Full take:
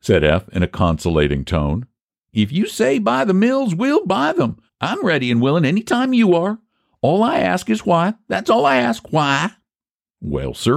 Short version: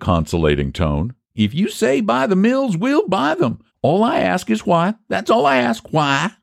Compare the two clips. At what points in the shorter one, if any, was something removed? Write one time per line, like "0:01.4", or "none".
0:01.2
0:03.7